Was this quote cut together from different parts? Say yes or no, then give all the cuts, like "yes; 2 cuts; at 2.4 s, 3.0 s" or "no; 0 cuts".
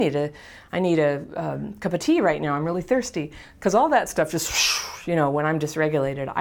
no; 0 cuts